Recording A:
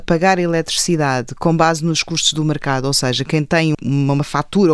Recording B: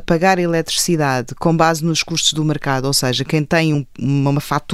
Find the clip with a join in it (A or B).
A